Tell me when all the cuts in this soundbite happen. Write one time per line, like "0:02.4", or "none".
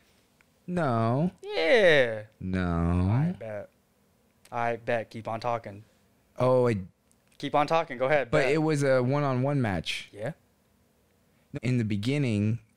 0:11.5